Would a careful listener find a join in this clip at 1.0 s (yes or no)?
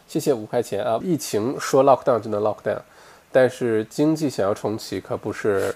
yes